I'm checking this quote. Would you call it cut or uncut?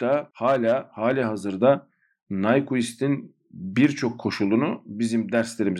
uncut